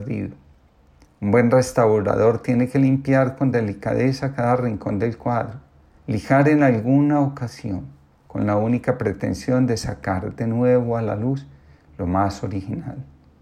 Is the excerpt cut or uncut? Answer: cut